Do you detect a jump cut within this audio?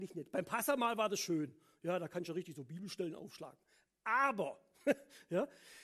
no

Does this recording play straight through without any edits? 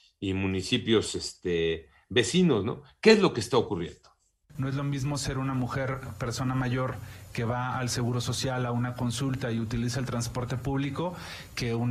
yes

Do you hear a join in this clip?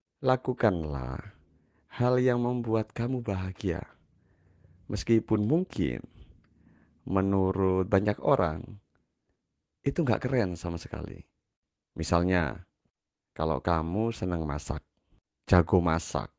no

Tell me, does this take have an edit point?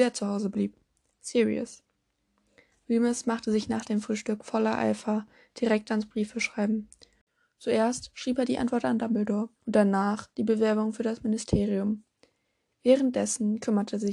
yes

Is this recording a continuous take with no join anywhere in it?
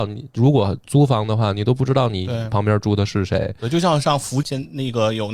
no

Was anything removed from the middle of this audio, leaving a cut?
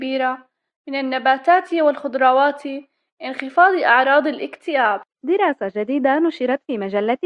no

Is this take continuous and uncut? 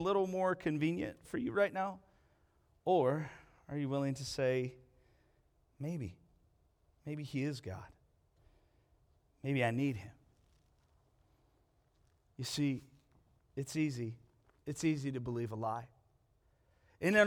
yes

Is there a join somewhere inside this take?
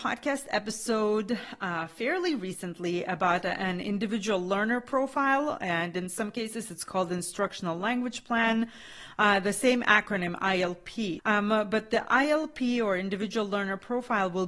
yes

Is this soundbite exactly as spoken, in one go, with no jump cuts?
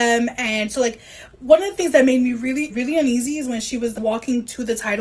no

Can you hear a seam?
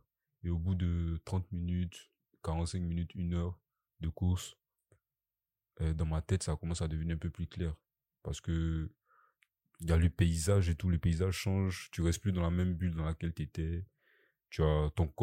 no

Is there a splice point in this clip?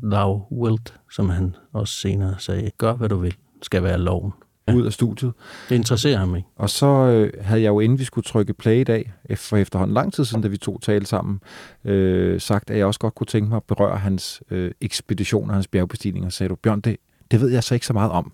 yes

